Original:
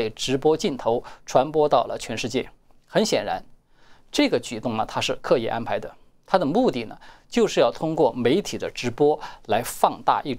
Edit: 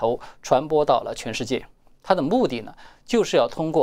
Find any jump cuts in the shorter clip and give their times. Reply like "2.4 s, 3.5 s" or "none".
2.0 s

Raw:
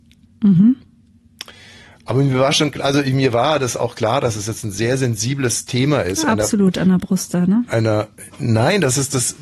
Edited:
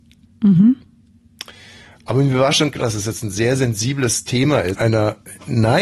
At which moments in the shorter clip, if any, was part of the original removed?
2.8 s, 4.7 s

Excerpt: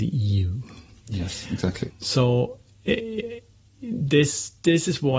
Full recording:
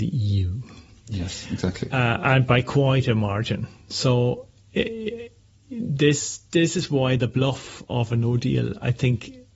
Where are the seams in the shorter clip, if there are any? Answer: 1.9 s

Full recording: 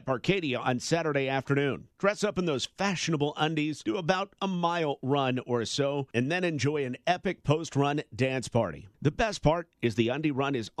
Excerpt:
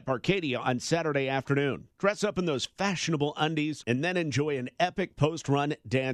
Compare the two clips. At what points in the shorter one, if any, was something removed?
3.8 s

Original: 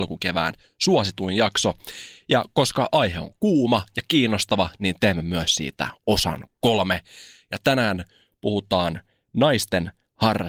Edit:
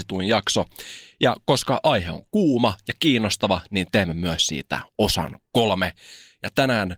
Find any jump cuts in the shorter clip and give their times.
none

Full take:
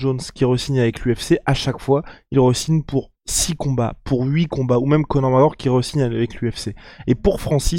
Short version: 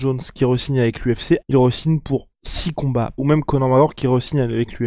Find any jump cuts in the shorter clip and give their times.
1.4 s, 3.2 s

